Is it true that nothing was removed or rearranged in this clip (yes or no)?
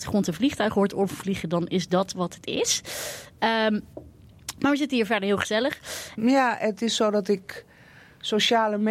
no